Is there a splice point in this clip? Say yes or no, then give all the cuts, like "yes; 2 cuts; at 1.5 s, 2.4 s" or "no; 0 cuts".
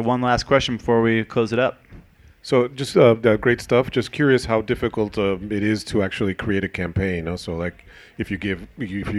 no; 0 cuts